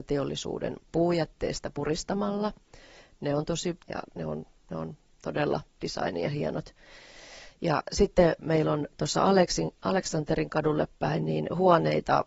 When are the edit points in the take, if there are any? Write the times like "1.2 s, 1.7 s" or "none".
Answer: 3.8 s, 7.5 s